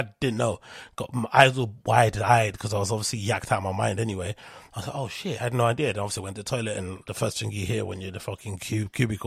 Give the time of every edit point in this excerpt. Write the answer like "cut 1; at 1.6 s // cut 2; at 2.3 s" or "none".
none